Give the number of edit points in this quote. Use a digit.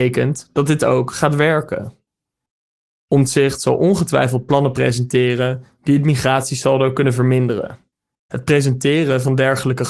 1